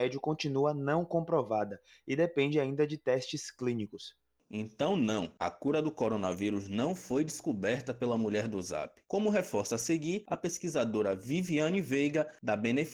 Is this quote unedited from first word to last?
yes; 0 cuts

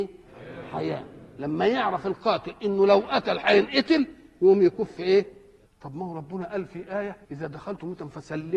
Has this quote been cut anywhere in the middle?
yes; 2 cuts; at 5.7 s, 7.2 s

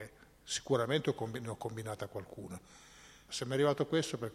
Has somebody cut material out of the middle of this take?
yes; 1 cut; at 3.3 s

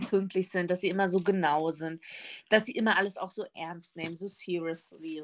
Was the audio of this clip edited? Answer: no; 0 cuts

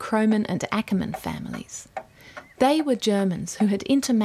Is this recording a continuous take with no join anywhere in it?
yes; 0 cuts

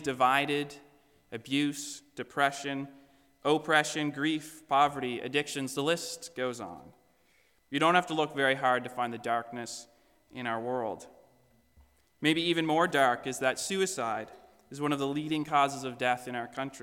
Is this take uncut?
yes; 0 cuts

